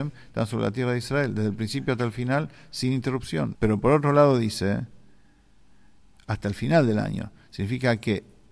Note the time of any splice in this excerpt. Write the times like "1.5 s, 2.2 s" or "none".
3.5 s